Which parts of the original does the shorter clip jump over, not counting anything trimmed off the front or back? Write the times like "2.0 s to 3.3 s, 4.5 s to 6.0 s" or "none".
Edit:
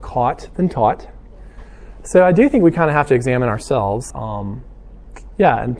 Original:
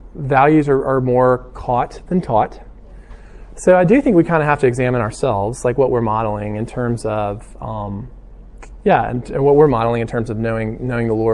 5.6 s to 7.6 s